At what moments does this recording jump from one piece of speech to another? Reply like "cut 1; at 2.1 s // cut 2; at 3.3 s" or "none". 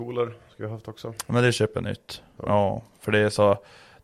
cut 1; at 2.4 s